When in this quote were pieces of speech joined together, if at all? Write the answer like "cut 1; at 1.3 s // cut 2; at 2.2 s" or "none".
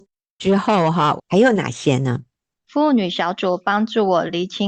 cut 1; at 1.2 s